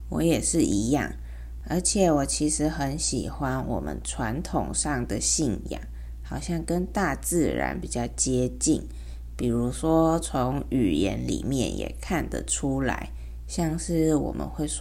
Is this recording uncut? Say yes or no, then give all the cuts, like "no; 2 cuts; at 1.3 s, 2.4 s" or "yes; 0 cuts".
yes; 0 cuts